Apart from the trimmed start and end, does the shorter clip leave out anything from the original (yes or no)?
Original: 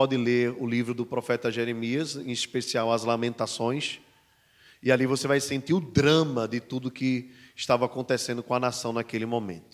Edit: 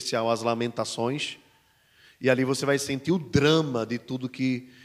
no